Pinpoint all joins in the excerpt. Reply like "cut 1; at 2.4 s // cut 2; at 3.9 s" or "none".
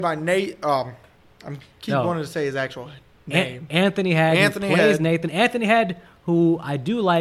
none